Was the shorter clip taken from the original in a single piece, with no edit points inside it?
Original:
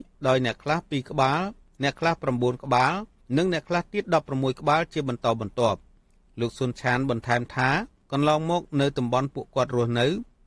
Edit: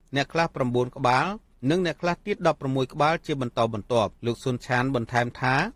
no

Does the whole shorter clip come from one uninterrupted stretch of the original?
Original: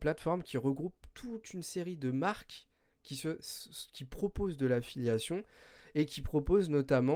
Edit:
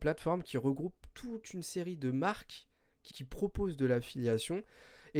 no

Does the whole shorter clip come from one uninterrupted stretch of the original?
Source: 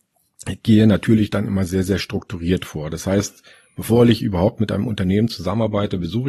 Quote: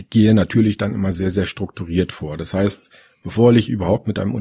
yes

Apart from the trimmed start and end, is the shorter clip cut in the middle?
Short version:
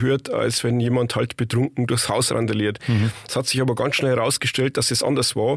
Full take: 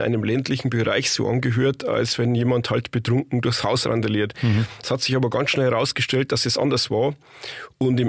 no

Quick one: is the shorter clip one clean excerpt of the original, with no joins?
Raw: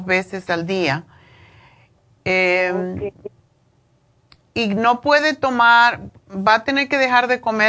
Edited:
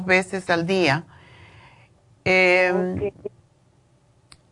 yes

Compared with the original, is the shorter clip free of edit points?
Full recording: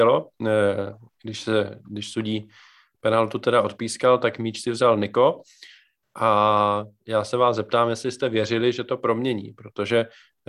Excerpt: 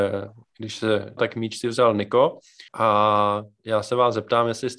no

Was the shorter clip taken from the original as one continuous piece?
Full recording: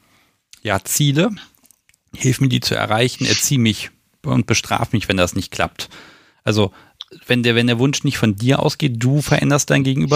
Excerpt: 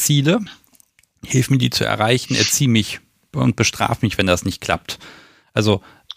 yes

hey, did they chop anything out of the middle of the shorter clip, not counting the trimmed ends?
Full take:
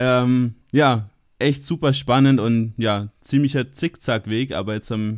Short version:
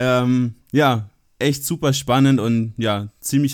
no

